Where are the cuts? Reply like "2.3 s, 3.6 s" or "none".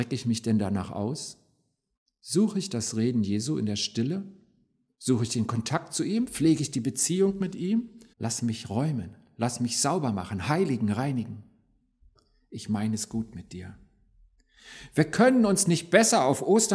8.1 s